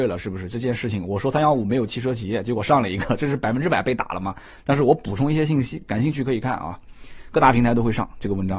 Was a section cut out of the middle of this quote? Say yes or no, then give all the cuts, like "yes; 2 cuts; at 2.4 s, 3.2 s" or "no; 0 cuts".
no; 0 cuts